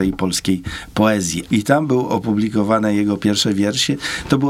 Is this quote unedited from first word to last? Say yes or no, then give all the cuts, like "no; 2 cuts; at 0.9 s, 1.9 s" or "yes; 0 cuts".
no; 1 cut; at 1.5 s